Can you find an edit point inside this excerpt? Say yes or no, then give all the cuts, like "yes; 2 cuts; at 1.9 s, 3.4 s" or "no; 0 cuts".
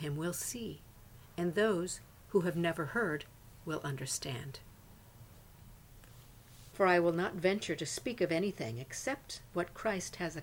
yes; 1 cut; at 6.7 s